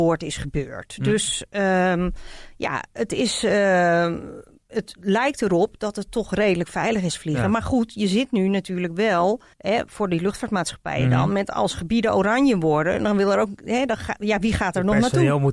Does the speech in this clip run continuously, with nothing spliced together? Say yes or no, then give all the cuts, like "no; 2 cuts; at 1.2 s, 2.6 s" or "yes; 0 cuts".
no; 1 cut; at 9.5 s